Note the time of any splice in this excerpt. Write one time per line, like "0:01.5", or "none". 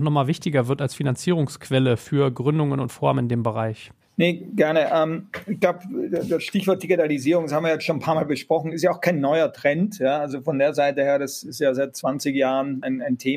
none